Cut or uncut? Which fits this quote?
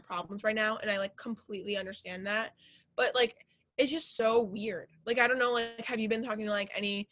uncut